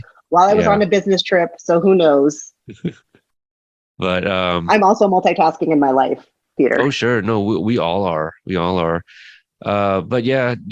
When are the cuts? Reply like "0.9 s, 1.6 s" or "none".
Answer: none